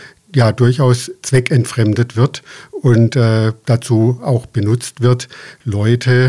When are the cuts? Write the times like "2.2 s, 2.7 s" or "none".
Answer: none